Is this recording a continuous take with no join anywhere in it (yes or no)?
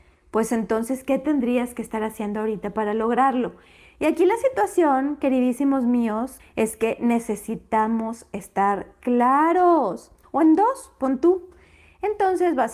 no